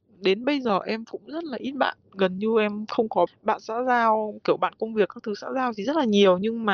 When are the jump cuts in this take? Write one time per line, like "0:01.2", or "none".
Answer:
0:03.3